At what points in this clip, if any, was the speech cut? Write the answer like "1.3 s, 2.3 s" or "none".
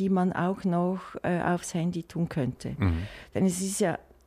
none